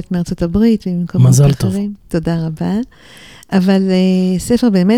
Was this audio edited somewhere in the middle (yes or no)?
no